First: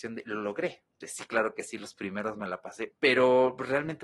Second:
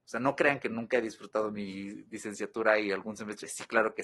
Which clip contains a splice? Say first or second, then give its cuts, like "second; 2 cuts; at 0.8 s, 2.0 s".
first; 2 cuts; at 1.0 s, 2.9 s